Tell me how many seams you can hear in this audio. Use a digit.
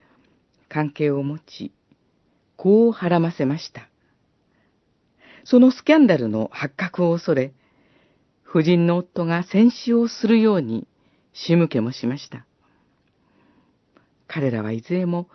0